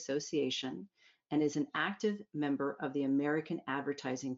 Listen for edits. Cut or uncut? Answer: uncut